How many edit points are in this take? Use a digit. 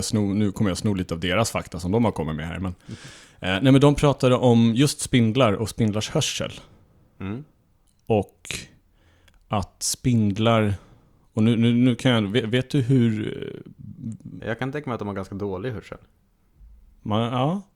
1